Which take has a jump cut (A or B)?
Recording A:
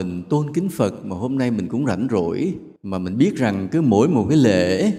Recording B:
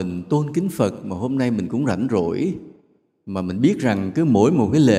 A